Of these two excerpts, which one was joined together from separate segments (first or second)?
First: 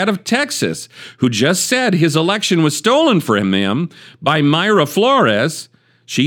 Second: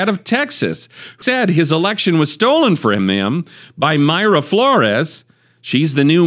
second